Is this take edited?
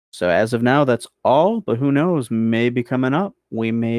no; 0 cuts

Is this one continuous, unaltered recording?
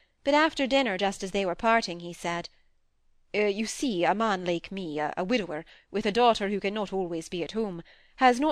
yes; 0 cuts

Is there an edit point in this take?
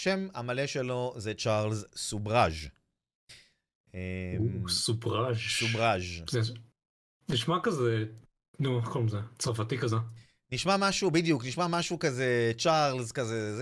no; 0 cuts

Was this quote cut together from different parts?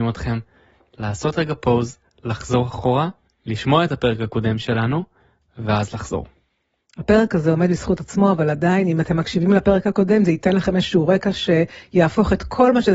no; 0 cuts

